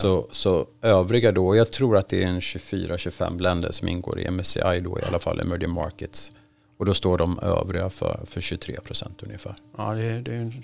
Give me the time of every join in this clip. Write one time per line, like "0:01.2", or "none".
none